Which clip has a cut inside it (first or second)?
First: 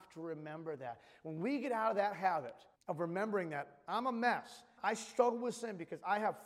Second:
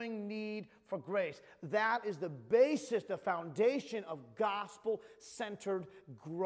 first